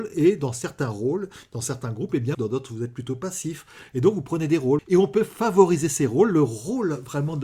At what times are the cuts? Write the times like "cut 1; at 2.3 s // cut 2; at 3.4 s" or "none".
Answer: cut 1; at 2.3 s // cut 2; at 4.8 s